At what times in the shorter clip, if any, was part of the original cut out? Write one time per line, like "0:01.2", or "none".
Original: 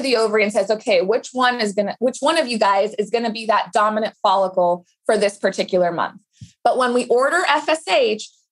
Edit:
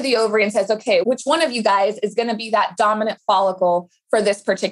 0:01.0